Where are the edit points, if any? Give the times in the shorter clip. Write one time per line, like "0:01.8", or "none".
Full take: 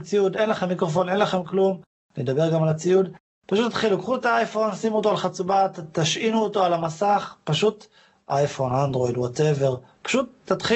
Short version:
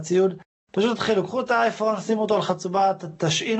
none